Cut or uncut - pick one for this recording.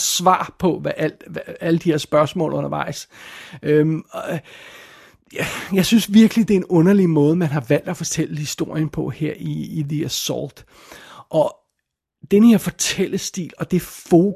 uncut